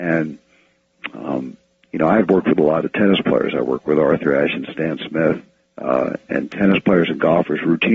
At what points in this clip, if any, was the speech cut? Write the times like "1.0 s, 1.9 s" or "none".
none